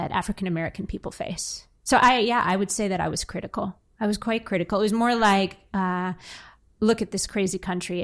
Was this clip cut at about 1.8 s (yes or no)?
yes